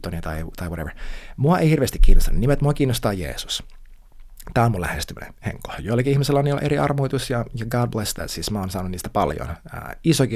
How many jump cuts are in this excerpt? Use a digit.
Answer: 0